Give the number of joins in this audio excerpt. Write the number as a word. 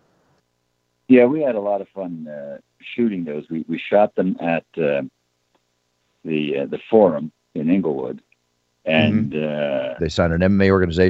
one